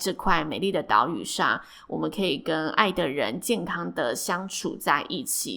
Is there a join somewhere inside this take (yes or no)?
no